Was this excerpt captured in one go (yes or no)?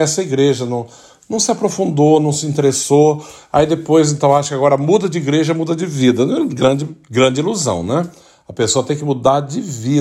yes